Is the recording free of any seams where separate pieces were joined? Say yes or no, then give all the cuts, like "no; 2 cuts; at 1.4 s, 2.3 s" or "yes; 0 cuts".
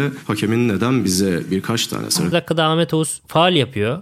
no; 1 cut; at 2.3 s